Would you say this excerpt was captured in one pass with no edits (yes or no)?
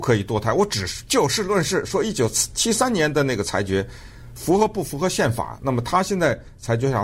yes